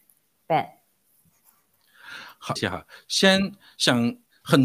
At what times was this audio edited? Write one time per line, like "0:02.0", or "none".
0:02.6